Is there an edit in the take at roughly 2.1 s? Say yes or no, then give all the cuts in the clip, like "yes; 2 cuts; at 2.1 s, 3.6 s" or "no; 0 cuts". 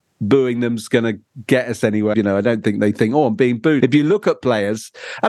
yes; 2 cuts; at 2.1 s, 3.8 s